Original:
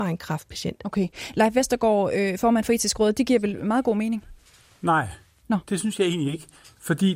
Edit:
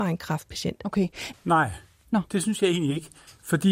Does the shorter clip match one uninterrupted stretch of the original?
no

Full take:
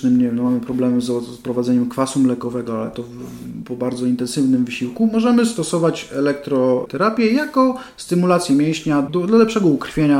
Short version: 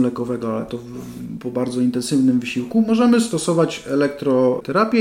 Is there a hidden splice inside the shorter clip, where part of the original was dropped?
no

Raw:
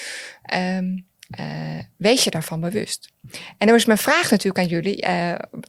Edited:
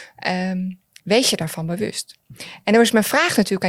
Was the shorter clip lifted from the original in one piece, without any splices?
no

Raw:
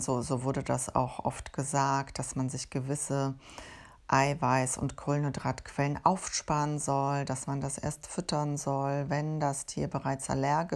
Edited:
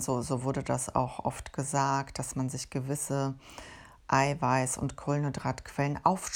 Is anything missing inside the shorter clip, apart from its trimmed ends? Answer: no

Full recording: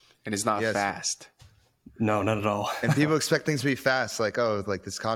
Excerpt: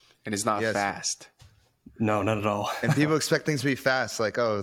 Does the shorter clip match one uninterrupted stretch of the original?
yes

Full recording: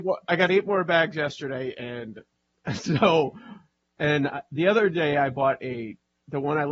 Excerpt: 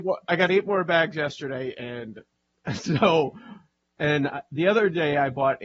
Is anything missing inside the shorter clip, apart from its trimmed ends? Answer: no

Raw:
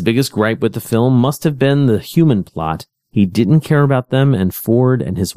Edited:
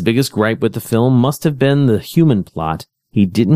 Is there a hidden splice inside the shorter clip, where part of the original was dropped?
no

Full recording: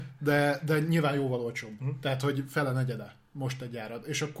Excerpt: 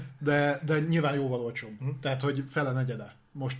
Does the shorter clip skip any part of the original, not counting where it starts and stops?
no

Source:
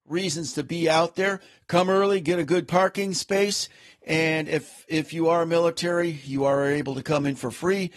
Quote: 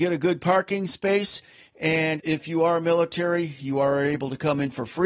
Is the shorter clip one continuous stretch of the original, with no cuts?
no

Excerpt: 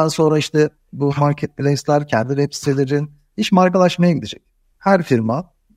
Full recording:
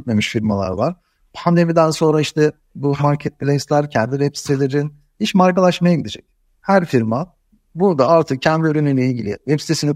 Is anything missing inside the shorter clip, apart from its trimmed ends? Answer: no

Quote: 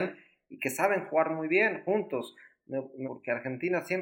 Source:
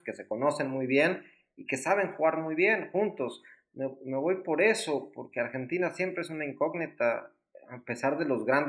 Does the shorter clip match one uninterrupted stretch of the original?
no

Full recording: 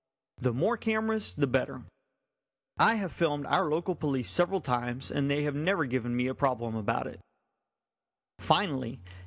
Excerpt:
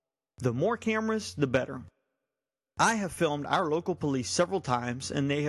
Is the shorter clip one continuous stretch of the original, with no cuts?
yes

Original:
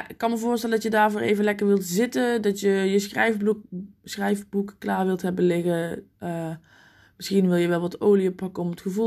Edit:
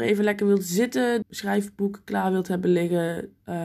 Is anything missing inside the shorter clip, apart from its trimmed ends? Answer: yes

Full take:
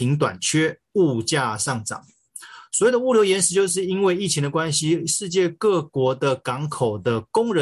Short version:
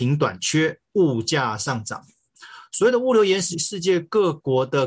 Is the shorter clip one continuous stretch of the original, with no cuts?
no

